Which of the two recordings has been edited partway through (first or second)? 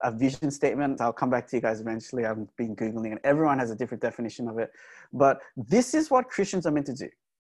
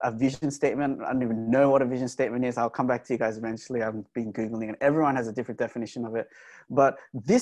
first